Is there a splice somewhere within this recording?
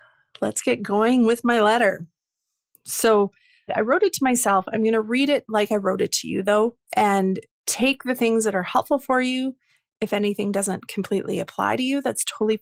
yes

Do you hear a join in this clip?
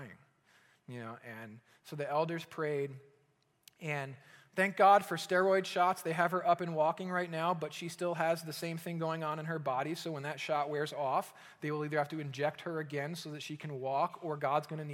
no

